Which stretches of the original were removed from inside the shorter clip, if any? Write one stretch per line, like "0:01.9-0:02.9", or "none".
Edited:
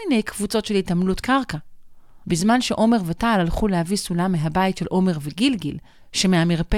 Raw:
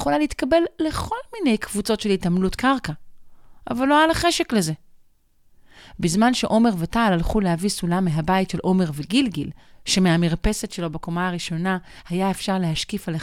0:03.6-0:06.0